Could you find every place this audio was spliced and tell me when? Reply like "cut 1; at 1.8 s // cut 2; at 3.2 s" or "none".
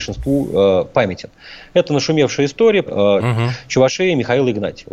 cut 1; at 2.9 s